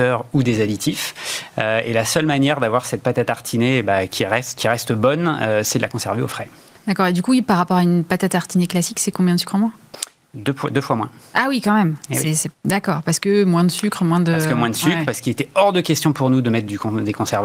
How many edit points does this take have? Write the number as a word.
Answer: two